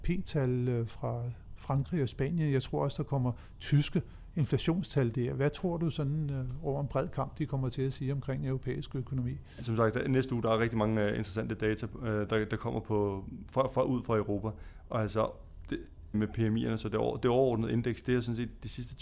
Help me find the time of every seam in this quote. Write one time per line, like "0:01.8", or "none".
0:09.6
0:16.1